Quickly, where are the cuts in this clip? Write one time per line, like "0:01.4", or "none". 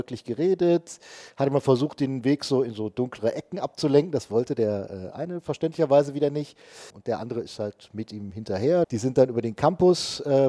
0:06.9
0:08.8